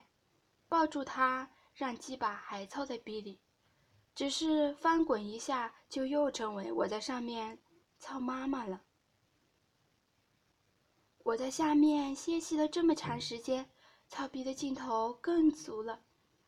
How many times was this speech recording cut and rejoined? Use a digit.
0